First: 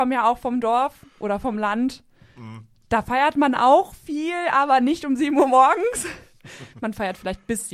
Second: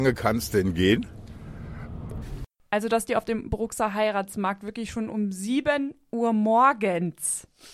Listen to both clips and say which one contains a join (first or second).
second